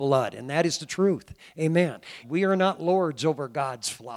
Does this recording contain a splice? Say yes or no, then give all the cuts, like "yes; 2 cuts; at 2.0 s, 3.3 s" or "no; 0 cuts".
yes; 1 cut; at 2.2 s